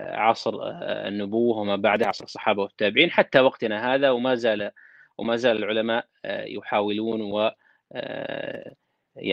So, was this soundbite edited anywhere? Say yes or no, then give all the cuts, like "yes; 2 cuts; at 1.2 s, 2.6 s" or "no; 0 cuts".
no; 0 cuts